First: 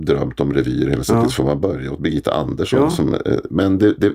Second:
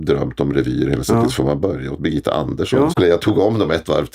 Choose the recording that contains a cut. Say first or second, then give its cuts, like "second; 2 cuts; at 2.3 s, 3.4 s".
second; 1 cut; at 2.9 s